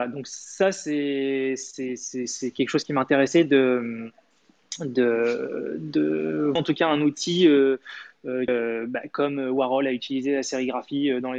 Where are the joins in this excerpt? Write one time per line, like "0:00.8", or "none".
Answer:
0:06.6
0:08.5